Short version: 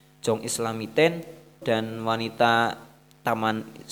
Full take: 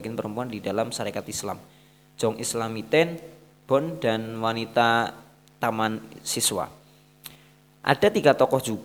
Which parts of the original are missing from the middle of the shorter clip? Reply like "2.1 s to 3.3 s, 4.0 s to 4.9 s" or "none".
3.6 s to 4.0 s